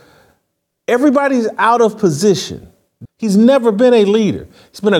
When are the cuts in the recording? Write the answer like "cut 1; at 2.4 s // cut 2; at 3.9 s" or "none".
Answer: cut 1; at 3.0 s